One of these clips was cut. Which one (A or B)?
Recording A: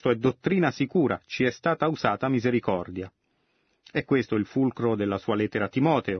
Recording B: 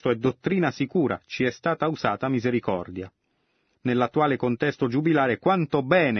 B